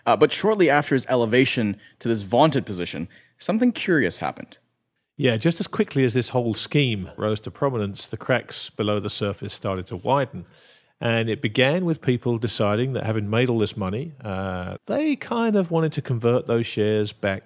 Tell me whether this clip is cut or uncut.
cut